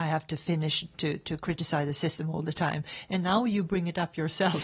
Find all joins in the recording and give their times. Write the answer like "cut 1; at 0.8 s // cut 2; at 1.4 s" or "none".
none